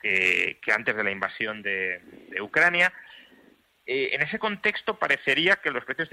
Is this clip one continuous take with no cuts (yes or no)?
yes